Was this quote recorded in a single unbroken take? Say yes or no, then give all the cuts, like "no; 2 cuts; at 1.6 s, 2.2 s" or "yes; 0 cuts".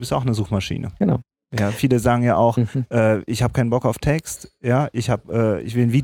yes; 0 cuts